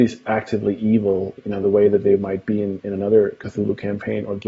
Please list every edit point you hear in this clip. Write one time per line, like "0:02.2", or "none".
0:01.4